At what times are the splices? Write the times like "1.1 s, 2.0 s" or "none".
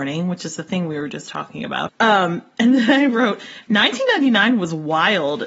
1.9 s